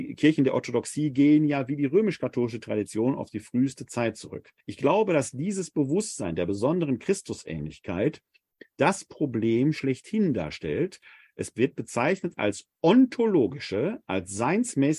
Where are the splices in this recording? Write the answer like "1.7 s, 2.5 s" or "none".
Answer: 4.6 s